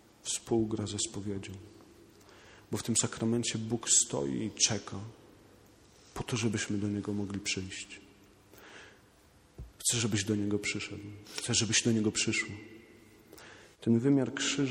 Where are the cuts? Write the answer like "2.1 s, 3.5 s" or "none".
9.7 s, 13.7 s